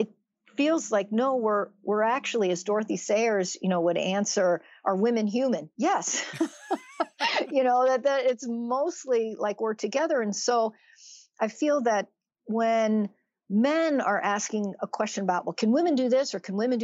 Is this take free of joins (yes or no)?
yes